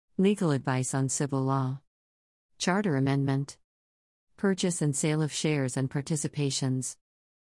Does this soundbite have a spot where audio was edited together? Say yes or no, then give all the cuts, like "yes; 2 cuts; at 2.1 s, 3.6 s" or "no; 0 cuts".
yes; 1 cut; at 2.5 s